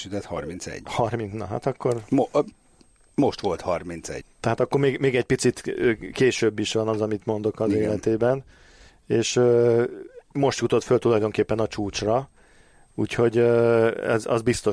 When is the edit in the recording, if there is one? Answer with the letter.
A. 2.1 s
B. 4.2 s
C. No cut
B